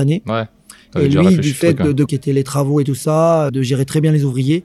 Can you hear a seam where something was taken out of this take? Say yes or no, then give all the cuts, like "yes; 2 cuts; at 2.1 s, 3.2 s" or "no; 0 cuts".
yes; 2 cuts; at 2.1 s, 3.5 s